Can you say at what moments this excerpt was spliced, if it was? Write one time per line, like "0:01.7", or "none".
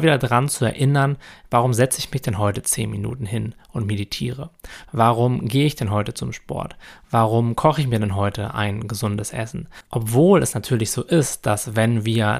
0:04.8
0:09.9